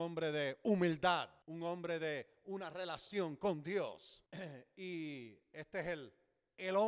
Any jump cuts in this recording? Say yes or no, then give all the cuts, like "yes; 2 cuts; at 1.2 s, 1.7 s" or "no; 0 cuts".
no; 0 cuts